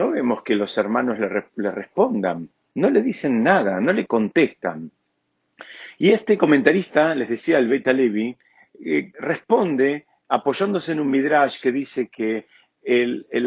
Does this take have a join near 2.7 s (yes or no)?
yes